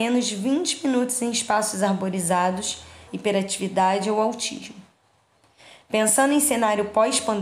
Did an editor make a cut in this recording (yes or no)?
yes